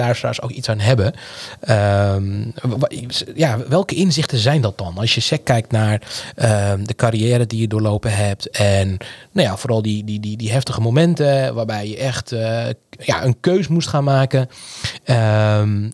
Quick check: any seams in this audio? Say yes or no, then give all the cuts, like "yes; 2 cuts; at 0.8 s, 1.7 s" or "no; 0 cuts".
no; 0 cuts